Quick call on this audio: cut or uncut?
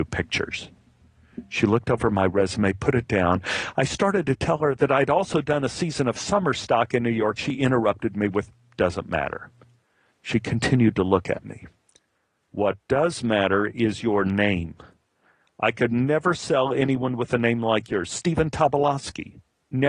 uncut